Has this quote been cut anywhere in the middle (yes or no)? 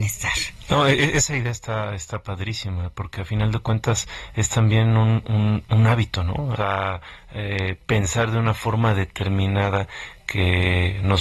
yes